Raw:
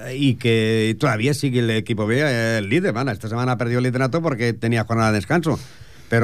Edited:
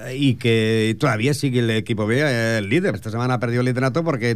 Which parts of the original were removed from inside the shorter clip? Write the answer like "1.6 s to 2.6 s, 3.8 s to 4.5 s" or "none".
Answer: 2.9 s to 3.1 s